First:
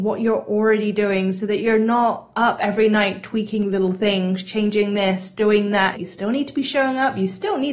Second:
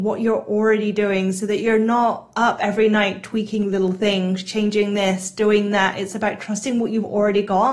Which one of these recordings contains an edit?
first; 1 cut; at 5.9 s

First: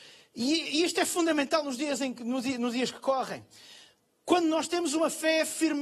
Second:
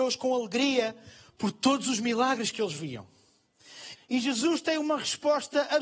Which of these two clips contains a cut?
second; 1 cut; at 3.9 s

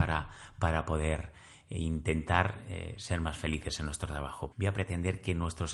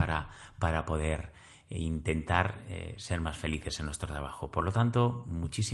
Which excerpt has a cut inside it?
first; 1 cut; at 4.5 s

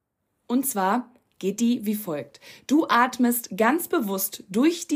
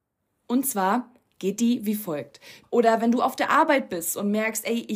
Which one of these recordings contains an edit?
second; 1 cut; at 2.6 s

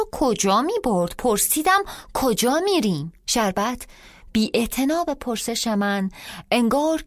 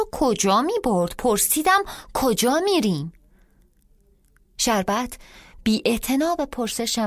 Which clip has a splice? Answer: first; 1 cut; at 3.2 s

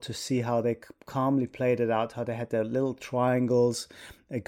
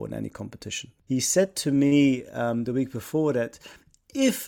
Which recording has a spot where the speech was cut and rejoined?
second; 1 cut; at 1.1 s

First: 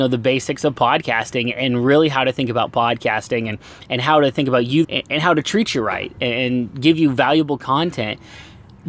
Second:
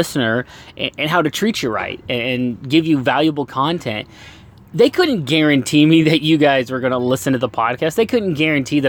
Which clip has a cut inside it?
first; 1 cut; at 4.8 s

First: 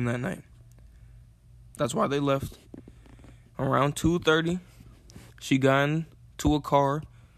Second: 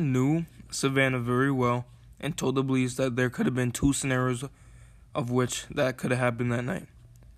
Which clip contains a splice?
first; 2 cuts; at 1.7 s, 3.5 s

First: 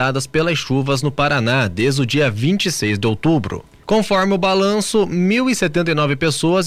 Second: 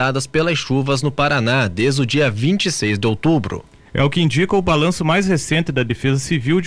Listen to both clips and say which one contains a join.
first; 1 cut; at 3.8 s

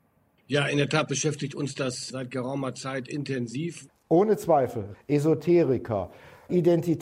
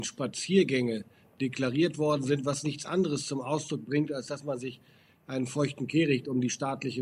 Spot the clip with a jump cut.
first; 2 cuts; at 3.9 s, 4.9 s

